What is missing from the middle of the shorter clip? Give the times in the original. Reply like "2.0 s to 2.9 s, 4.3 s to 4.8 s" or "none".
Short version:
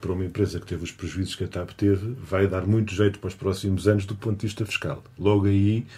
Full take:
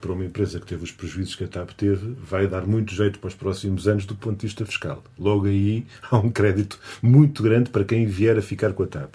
none

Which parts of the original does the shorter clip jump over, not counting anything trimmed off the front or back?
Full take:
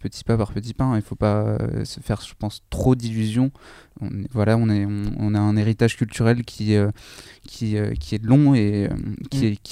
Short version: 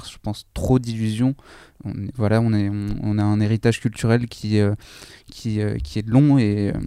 none

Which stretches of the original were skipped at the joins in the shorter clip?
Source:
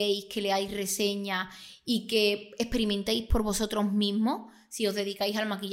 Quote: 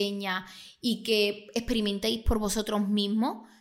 none

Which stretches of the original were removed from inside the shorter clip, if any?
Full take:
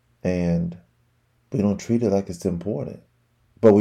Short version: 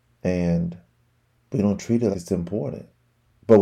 2.1 s to 2.2 s

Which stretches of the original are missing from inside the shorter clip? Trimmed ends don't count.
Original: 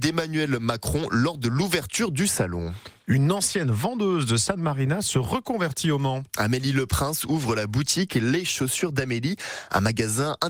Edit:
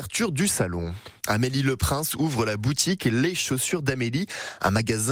3.0 s to 6.3 s

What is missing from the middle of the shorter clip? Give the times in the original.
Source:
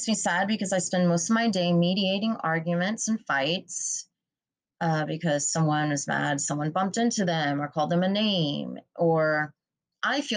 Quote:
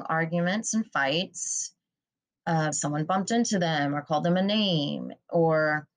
5.1 s to 6.4 s

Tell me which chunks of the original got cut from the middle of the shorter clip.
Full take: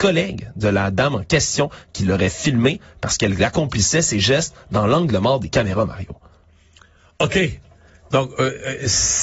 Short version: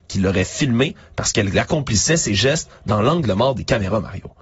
none

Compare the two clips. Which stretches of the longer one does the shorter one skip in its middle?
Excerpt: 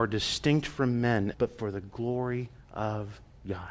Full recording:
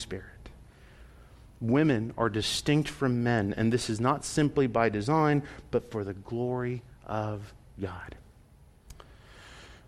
3.6 s to 5.7 s

